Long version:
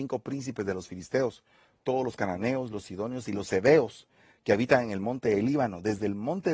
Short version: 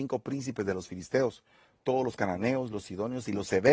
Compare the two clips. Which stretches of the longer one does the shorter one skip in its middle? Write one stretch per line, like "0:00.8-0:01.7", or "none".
none

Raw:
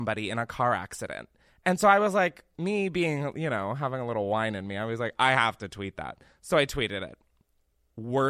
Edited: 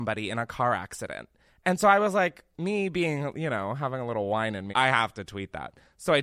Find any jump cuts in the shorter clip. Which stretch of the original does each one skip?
0:04.7-0:05.1

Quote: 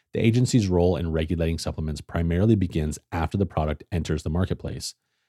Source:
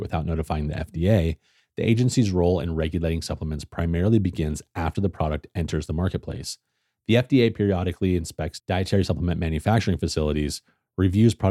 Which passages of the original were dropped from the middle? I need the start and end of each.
none

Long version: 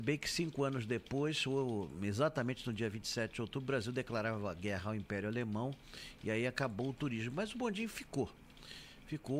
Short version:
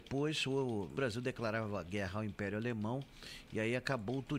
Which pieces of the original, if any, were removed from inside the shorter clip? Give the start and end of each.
0:02.0-0:03.7

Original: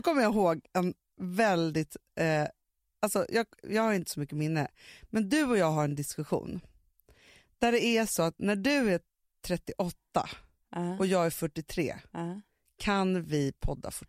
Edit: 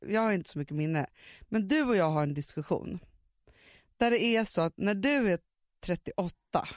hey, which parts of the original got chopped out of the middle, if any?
none

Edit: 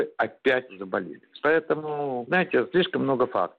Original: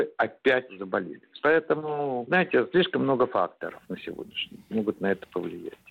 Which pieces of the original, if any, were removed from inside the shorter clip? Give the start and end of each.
none

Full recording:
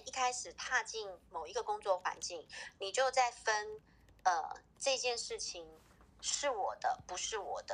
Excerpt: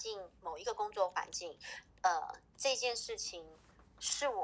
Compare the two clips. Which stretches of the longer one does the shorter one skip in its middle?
0:02.8-0:04.1

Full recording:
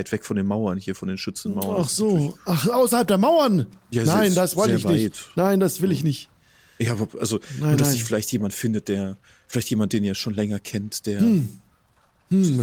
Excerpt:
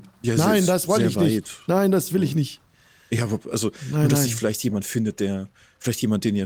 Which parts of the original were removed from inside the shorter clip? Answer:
none

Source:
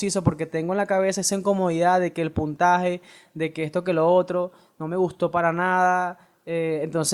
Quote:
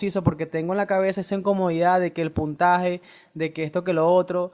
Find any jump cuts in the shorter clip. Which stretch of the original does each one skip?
none

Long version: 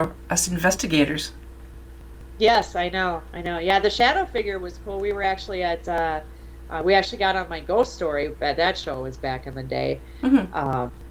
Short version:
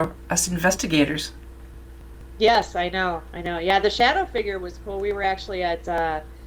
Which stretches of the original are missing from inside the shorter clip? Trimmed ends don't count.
none

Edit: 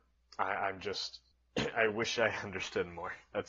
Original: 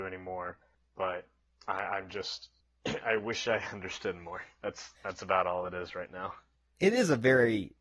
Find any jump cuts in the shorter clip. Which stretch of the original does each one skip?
none

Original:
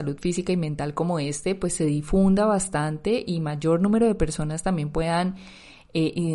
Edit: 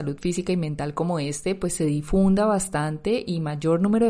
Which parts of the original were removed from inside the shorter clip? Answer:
none

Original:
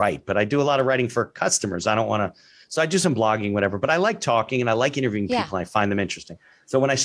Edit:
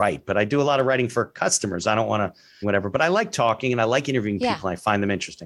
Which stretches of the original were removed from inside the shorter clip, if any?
0:02.6-0:03.5

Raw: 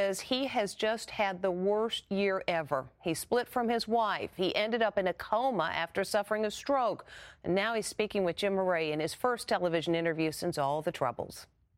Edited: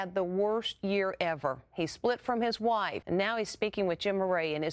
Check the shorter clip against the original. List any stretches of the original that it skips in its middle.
0:04.3-0:07.4

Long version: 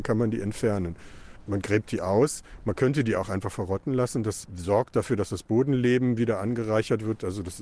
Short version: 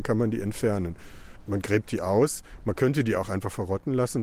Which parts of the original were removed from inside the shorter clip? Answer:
none

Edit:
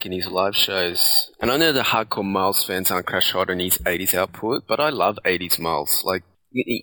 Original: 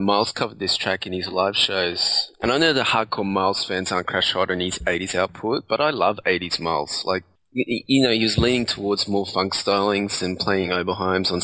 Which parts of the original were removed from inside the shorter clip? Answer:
none

